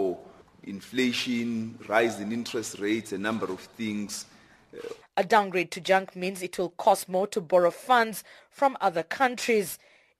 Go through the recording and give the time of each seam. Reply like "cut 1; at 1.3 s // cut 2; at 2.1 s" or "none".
cut 1; at 5.0 s